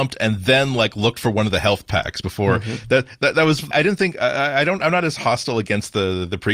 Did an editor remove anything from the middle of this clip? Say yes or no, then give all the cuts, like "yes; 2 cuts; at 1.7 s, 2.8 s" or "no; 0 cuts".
yes; 1 cut; at 3.7 s